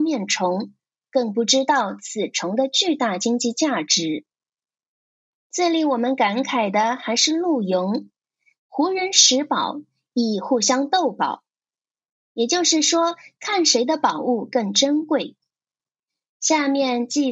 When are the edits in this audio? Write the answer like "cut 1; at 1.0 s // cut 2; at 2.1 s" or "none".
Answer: cut 1; at 5.3 s // cut 2; at 8.6 s